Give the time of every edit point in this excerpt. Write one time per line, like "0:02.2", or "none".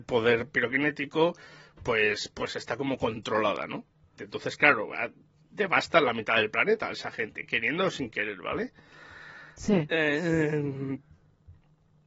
0:04.2